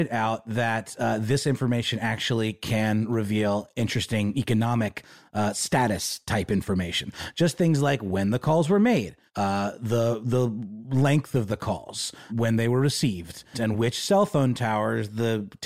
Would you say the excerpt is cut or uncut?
cut